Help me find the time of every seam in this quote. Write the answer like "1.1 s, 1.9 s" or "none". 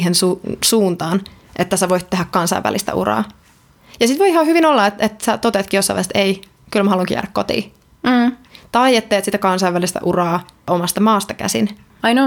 none